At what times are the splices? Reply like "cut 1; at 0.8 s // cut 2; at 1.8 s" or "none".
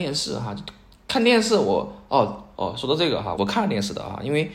cut 1; at 3.4 s